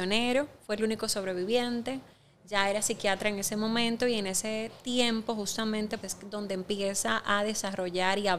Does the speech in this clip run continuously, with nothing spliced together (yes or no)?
no